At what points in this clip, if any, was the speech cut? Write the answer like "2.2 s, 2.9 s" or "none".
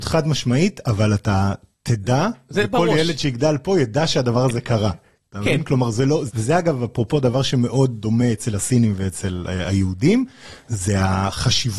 6.3 s